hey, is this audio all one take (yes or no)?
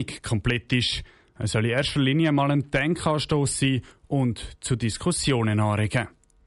yes